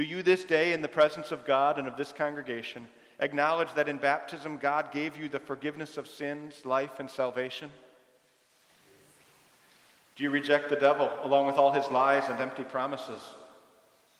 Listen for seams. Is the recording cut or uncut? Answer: uncut